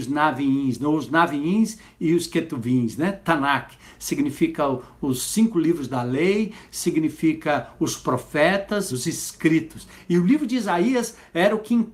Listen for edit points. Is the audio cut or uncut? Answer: cut